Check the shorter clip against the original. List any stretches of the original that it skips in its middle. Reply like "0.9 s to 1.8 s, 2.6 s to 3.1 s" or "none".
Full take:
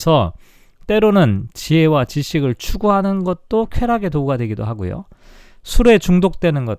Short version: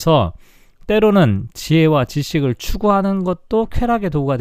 none